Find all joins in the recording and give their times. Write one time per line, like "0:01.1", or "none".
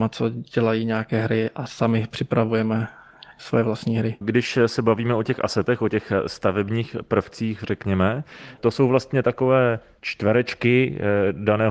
none